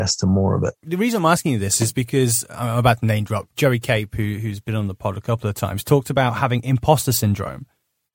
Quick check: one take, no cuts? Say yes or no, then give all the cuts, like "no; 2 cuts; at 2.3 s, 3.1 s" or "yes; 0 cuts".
yes; 0 cuts